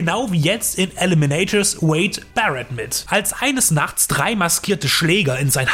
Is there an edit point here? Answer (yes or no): yes